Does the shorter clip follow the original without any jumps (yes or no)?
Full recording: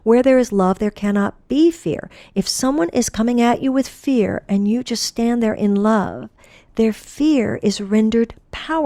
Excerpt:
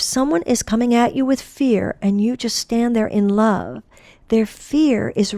yes